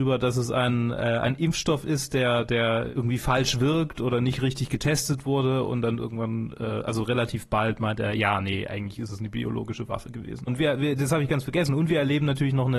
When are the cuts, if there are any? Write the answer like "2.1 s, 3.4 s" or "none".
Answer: 10.5 s